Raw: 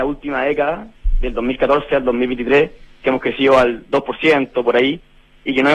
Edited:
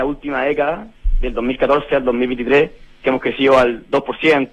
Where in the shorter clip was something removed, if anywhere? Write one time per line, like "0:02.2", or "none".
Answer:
none